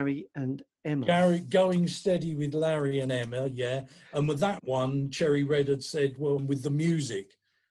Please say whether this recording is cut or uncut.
cut